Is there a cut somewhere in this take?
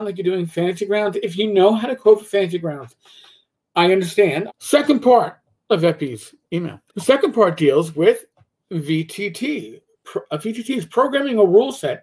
yes; 2 cuts; at 4.5 s, 6.9 s

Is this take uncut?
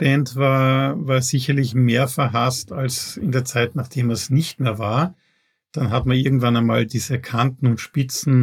yes; 0 cuts

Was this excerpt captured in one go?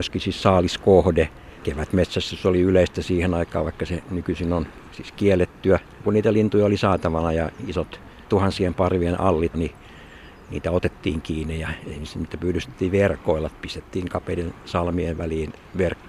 no; 2 cuts; at 6.0 s, 9.5 s

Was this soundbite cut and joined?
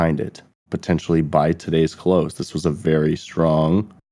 no; 0 cuts

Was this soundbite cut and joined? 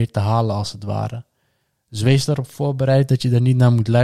no; 0 cuts

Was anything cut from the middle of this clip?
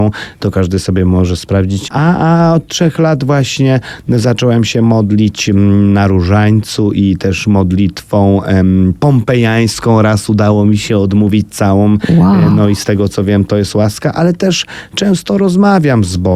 yes; 1 cut; at 1.9 s

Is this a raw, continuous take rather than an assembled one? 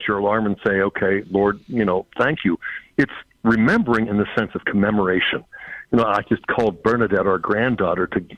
yes; 0 cuts

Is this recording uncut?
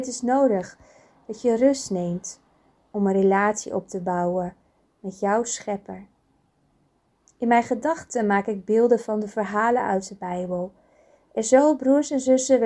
no; 1 cut; at 7.2 s

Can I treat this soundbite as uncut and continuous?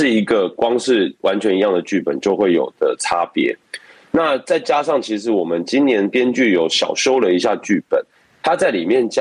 yes; 0 cuts

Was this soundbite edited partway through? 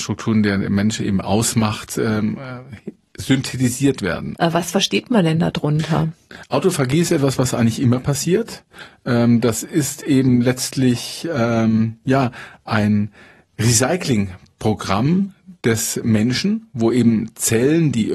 yes; 1 cut; at 4.3 s

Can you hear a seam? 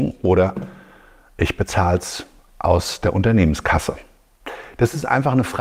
no; 0 cuts

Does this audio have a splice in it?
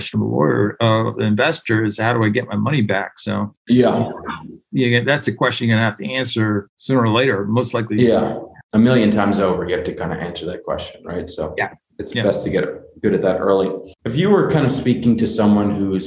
no; 0 cuts

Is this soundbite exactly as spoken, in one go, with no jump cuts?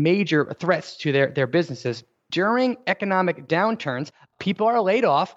no; 1 cut; at 2.3 s

